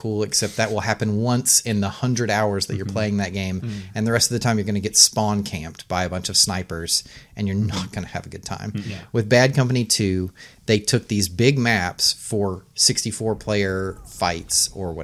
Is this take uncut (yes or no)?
yes